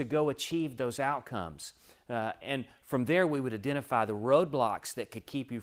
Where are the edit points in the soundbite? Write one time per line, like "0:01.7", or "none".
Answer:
0:02.4